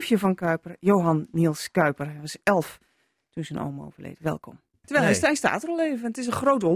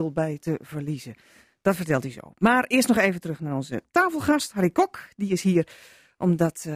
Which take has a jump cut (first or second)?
first